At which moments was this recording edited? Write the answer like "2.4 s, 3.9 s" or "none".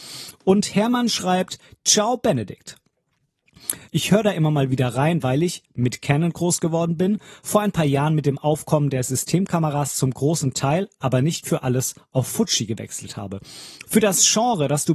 3.9 s, 13.8 s